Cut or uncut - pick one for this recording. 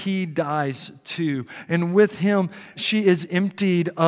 cut